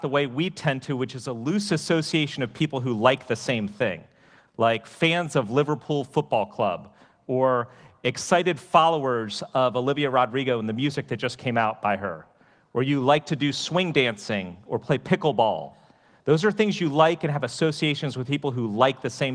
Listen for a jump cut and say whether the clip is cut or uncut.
uncut